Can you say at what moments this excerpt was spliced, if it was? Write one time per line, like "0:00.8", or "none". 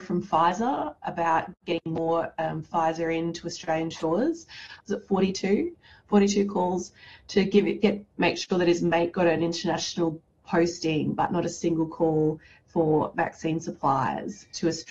0:04.8

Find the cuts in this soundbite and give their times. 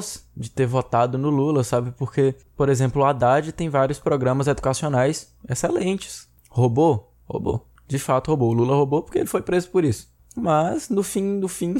none

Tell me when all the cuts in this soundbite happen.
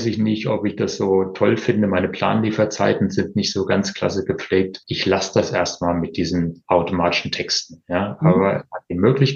none

